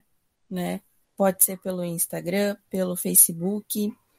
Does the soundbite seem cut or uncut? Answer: cut